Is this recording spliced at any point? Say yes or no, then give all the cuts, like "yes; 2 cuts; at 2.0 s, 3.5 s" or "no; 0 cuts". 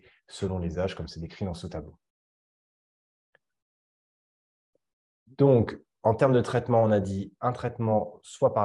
no; 0 cuts